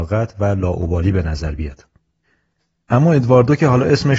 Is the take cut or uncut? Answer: uncut